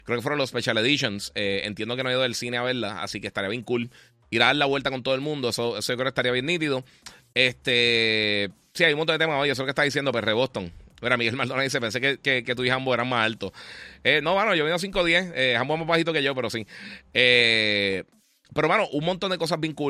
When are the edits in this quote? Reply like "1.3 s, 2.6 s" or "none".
none